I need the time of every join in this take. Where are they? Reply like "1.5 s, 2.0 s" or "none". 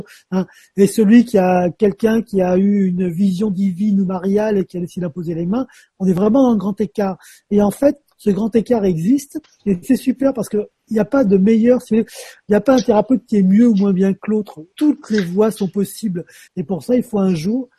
14.7 s, 16.5 s